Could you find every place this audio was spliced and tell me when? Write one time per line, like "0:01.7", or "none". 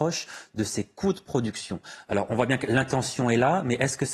none